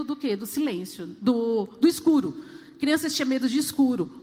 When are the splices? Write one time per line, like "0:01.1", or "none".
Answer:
none